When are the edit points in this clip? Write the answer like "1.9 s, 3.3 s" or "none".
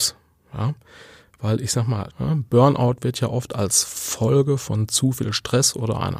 2.1 s

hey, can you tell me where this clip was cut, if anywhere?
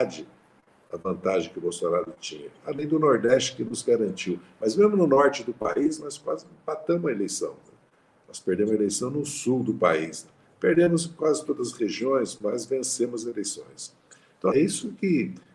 14.5 s

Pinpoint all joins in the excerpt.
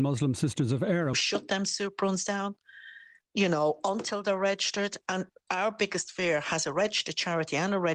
1.1 s

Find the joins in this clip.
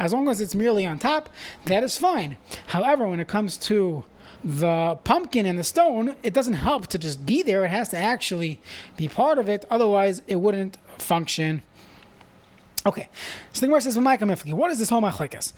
4.3 s

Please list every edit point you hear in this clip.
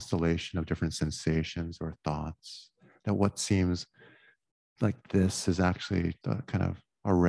6.2 s

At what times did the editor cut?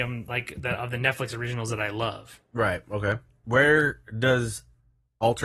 3.4 s

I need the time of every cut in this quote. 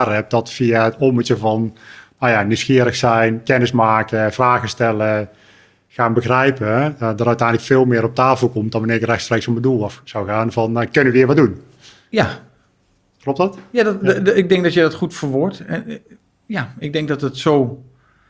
none

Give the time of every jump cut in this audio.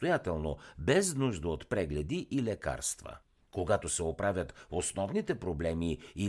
none

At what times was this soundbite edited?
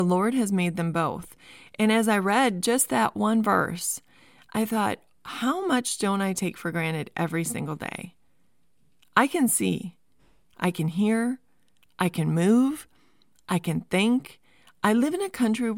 none

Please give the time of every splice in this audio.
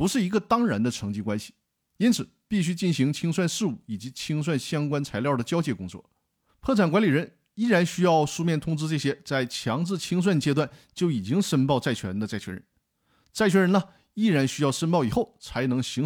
6.5 s

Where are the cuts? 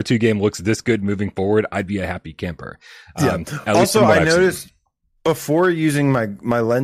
none

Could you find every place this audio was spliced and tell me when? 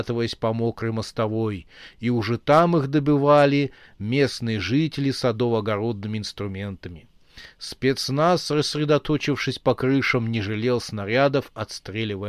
none

